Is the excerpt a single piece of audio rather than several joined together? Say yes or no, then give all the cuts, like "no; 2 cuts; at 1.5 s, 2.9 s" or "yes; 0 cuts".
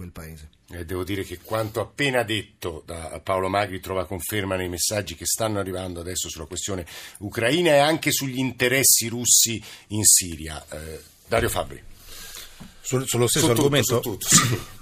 yes; 0 cuts